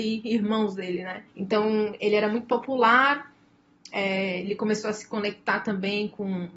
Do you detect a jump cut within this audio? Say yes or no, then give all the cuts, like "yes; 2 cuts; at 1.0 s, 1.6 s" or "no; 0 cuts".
yes; 1 cut; at 1.3 s